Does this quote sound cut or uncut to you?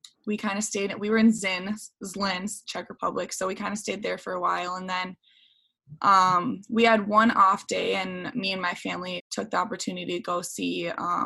cut